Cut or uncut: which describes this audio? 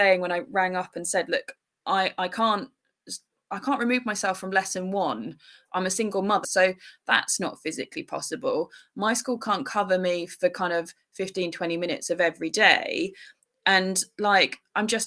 cut